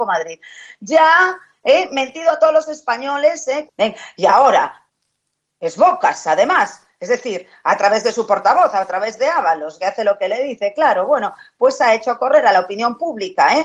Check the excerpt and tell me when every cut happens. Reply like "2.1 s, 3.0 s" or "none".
3.7 s